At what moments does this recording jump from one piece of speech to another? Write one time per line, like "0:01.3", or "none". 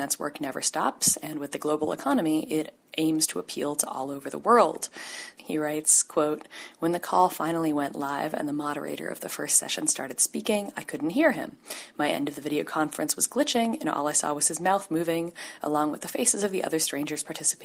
0:05.4